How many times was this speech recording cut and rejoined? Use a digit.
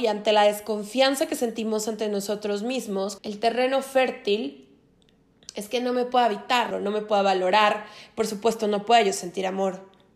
2